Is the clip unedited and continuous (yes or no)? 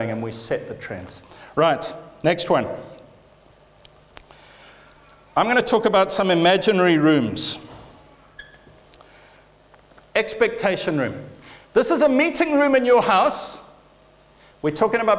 yes